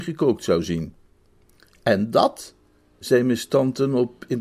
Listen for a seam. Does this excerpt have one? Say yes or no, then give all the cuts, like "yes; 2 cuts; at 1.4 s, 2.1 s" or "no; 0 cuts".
no; 0 cuts